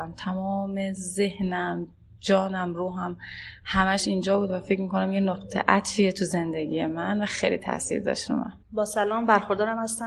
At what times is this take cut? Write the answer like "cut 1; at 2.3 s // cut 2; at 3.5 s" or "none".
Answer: cut 1; at 8.6 s